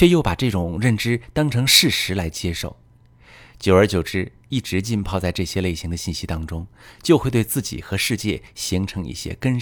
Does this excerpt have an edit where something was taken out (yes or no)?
no